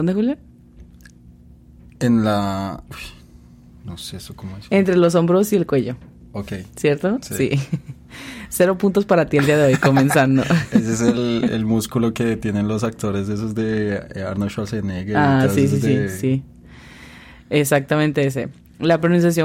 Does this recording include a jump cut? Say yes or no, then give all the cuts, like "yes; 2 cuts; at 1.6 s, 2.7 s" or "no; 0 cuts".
no; 0 cuts